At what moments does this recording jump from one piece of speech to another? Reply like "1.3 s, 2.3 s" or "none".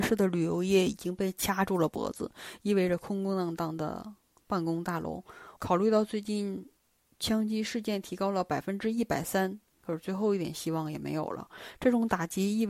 5.6 s

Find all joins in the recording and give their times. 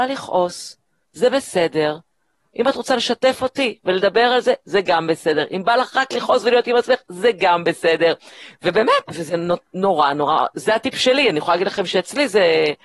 9.0 s

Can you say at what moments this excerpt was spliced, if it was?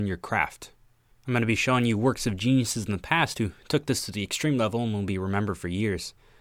1.1 s

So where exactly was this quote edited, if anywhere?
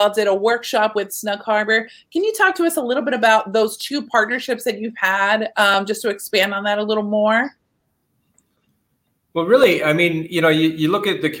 none

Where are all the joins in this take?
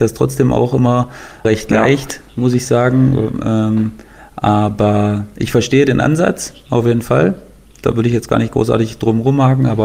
none

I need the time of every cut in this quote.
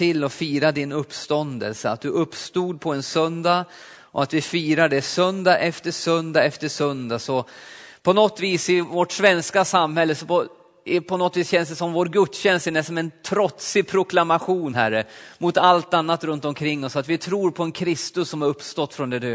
none

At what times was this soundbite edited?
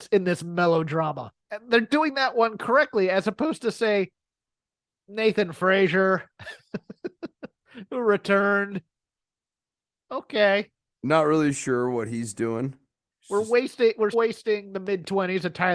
1.4 s, 14.1 s

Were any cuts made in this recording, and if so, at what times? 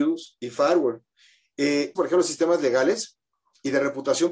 2.0 s

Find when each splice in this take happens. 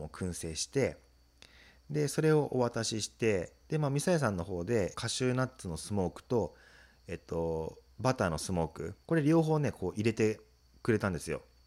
4.9 s, 9.0 s

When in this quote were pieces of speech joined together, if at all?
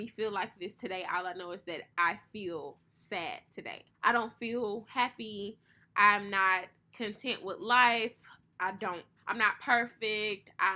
3.9 s, 9.2 s

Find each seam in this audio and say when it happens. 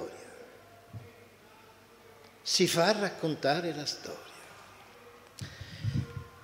none

